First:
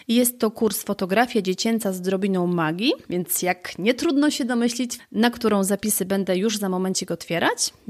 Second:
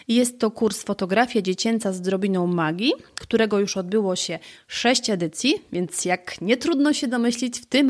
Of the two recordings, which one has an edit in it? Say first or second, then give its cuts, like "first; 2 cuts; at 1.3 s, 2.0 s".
first; 2 cuts; at 3.0 s, 5.0 s